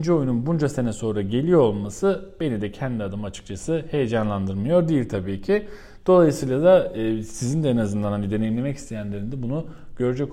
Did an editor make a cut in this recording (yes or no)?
no